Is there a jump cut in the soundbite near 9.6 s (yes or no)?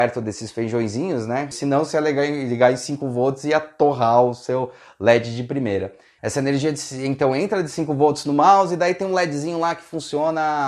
no